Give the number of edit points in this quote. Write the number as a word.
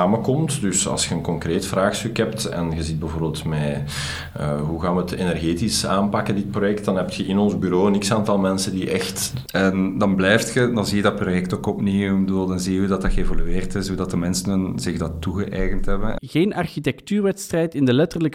two